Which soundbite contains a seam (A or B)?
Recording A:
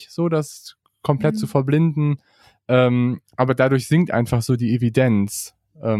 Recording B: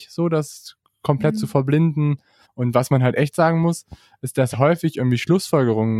B